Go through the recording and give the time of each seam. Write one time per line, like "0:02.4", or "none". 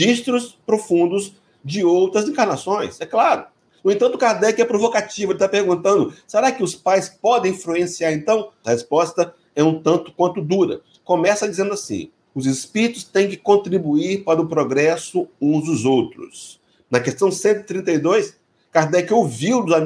0:08.6
0:12.3
0:16.8